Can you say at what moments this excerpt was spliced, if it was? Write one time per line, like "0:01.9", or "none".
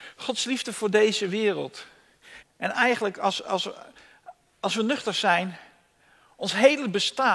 0:02.4